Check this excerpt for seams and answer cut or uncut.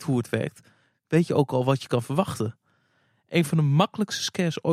uncut